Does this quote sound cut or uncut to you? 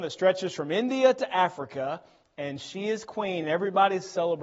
uncut